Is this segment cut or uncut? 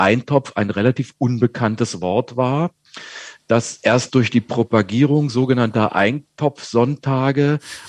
uncut